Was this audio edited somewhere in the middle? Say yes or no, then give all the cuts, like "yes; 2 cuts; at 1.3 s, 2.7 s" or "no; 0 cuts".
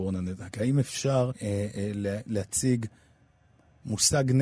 yes; 1 cut; at 1.3 s